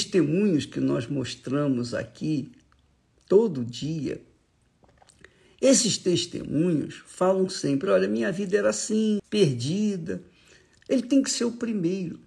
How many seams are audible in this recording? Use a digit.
2